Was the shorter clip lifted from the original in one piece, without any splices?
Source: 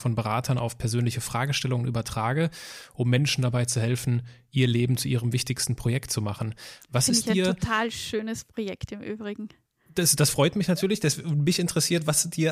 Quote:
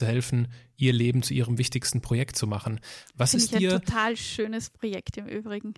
yes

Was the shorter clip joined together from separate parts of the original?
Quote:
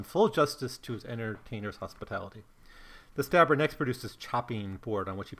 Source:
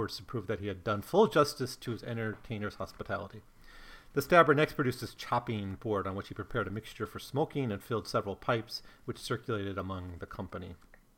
no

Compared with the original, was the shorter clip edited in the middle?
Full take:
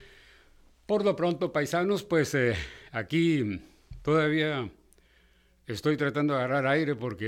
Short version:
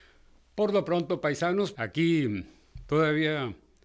yes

